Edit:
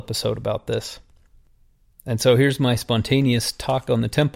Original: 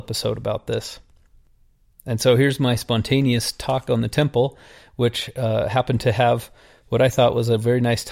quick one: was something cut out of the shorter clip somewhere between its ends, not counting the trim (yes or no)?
no